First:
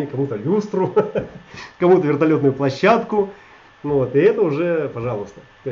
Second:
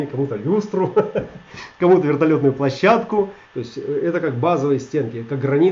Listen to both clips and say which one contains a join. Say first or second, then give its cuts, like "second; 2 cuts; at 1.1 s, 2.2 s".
second; 1 cut; at 3.4 s